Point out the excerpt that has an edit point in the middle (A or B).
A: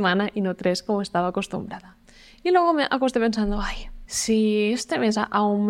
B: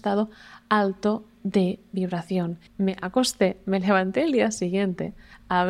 B